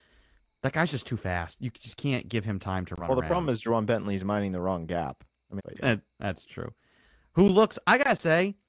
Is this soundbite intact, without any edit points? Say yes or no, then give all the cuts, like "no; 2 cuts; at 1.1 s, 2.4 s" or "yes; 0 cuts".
no; 1 cut; at 5.6 s